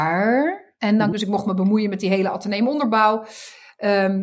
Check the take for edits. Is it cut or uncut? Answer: cut